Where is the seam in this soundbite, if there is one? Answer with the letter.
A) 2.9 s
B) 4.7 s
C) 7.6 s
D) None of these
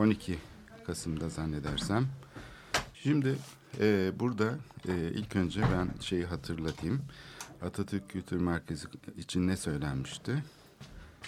A